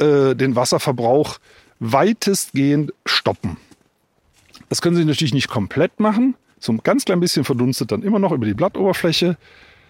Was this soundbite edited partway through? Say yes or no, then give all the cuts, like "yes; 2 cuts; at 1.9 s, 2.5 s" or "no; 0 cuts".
no; 0 cuts